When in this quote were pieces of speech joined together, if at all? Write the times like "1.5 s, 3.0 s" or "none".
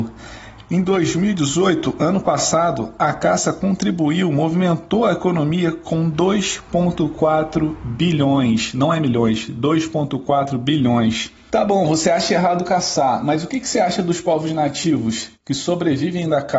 none